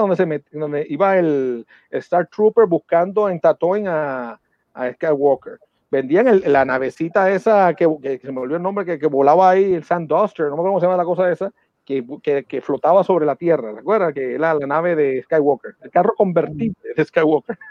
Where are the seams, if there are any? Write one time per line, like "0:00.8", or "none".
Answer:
none